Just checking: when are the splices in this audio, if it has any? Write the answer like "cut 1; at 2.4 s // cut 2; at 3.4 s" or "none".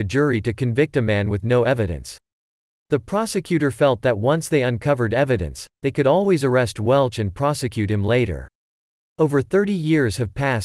none